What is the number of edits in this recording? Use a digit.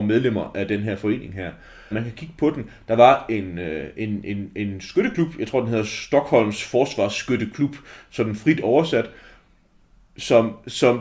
1